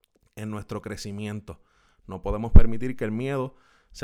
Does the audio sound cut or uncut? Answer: uncut